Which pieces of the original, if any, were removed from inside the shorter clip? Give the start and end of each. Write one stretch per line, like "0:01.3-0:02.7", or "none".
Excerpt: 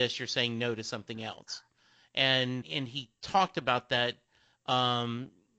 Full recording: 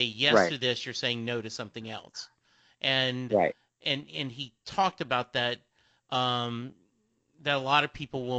0:03.3-0:04.1